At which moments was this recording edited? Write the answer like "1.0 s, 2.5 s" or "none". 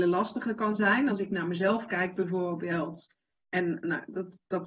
none